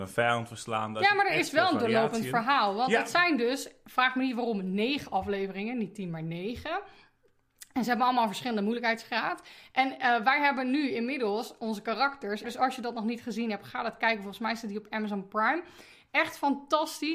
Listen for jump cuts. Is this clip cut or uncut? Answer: cut